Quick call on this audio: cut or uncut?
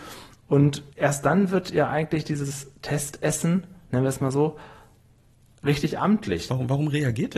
cut